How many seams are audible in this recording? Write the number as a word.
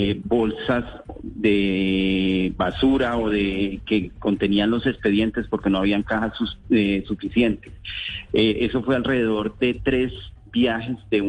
zero